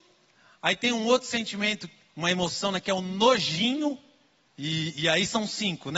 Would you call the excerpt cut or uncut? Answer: cut